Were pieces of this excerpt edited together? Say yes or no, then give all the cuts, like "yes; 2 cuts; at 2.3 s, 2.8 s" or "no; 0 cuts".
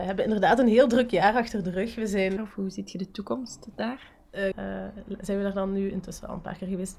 yes; 2 cuts; at 2.4 s, 4.5 s